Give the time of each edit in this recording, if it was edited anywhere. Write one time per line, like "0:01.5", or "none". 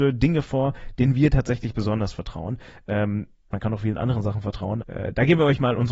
0:03.5
0:04.8